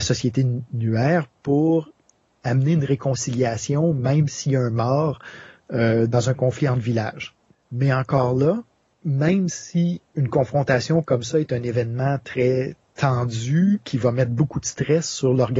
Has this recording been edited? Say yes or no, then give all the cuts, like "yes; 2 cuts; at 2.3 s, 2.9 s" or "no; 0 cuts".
yes; 3 cuts; at 6.1 s, 7.5 s, 10.1 s